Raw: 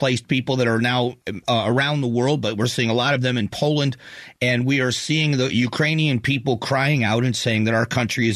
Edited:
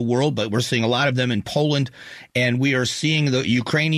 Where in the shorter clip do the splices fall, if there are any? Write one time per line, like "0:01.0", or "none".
none